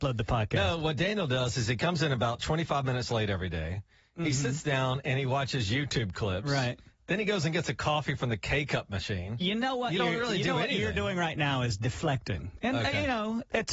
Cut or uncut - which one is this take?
uncut